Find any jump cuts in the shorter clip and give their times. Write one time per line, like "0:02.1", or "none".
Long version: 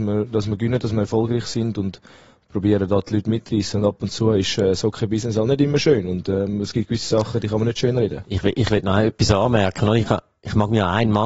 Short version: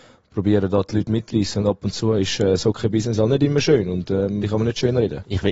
0:04.4